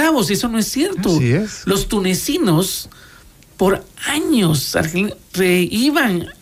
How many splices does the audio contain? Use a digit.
1